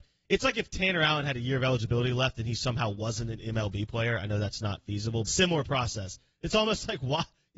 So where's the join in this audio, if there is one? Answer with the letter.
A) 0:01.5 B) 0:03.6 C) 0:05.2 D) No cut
C